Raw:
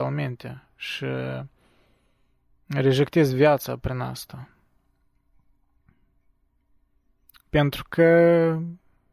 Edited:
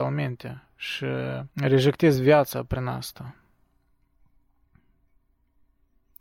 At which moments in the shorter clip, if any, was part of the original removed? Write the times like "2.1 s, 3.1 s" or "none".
1.5 s